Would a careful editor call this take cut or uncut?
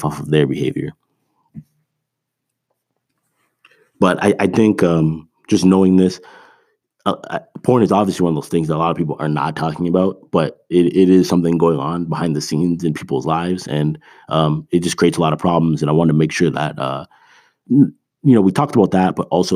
uncut